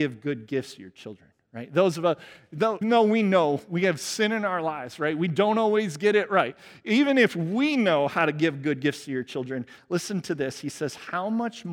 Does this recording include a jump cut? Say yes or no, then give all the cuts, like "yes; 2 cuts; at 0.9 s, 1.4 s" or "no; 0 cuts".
yes; 1 cut; at 2.8 s